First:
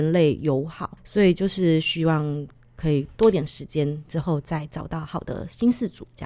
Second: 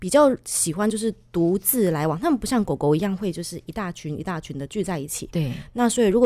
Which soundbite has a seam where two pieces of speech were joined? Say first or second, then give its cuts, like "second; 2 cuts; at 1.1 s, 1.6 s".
first; 2 cuts; at 1.0 s, 4.1 s